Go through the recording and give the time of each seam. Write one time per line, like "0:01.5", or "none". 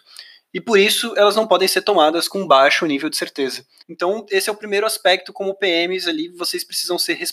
0:03.8

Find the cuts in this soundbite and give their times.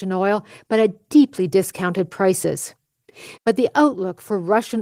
0:03.4

